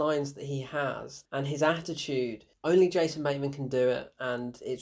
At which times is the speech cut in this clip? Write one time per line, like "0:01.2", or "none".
none